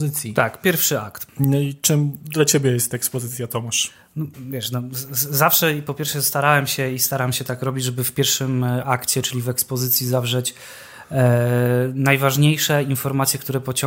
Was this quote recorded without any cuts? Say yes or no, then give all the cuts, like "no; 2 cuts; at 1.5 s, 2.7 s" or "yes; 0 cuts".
yes; 0 cuts